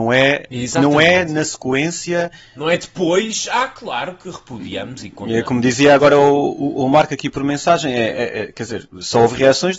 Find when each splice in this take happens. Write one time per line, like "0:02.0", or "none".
none